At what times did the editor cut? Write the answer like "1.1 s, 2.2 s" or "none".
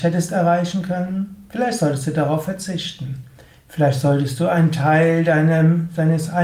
none